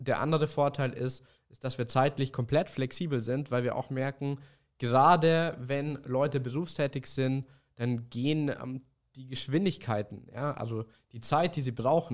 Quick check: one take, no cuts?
yes; 0 cuts

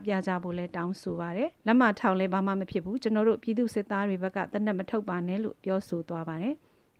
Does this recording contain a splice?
yes; 1 cut; at 1.6 s

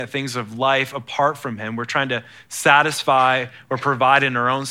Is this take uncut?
yes; 0 cuts

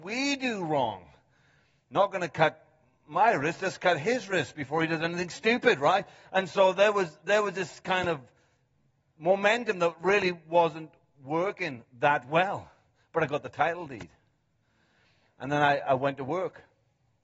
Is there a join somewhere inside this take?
no; 0 cuts

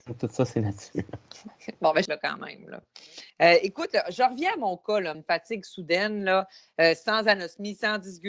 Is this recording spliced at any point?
yes; 3 cuts; at 2.1 s, 3.3 s, 5.1 s

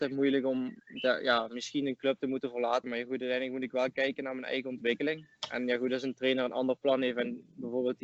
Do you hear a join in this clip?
yes; 1 cut; at 2.8 s

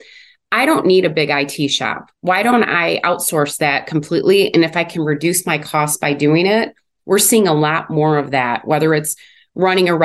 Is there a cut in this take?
no; 0 cuts

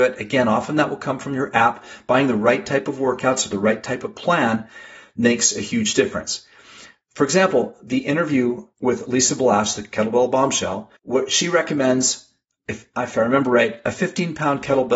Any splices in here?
yes; 1 cut; at 11.0 s

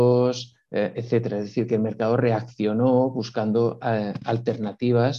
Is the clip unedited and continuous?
yes; 0 cuts

